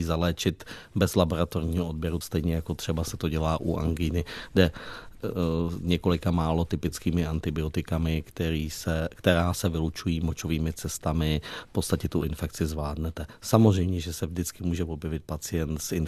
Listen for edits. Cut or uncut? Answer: cut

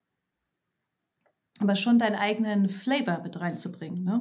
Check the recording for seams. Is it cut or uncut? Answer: uncut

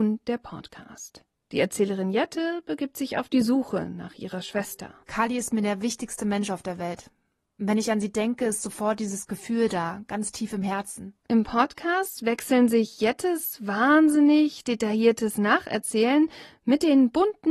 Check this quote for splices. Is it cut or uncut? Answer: cut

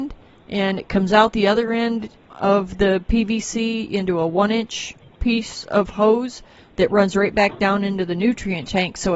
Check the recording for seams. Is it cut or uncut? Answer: cut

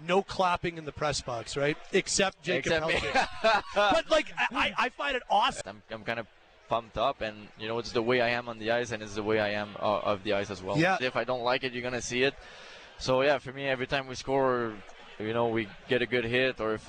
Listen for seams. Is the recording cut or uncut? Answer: cut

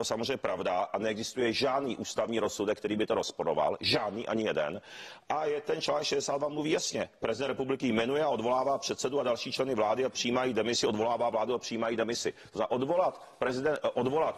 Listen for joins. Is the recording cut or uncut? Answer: uncut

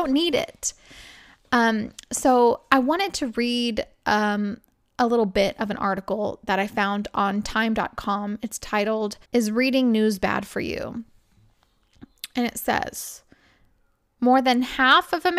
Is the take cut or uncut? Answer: cut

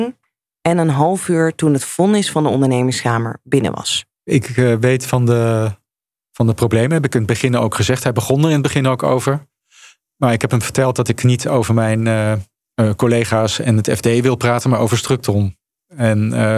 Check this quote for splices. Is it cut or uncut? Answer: uncut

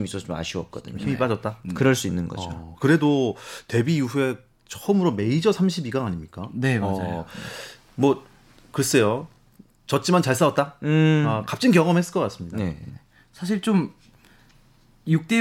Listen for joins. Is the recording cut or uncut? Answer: uncut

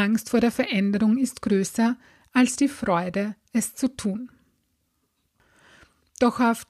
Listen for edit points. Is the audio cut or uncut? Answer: uncut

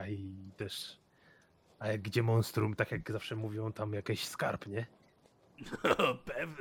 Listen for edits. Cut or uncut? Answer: uncut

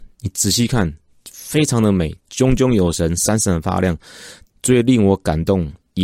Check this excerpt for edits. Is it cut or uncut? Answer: cut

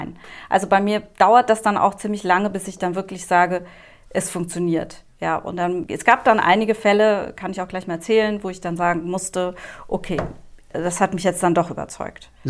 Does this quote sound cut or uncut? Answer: uncut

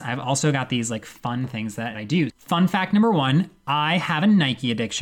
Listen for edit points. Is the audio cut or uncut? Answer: cut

